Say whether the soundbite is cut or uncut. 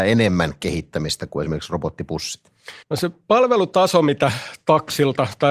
cut